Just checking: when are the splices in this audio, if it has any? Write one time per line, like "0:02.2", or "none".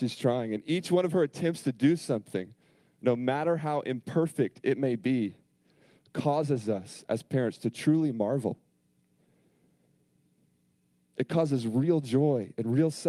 none